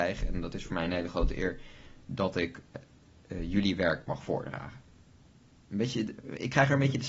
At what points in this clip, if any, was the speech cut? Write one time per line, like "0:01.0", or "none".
0:05.6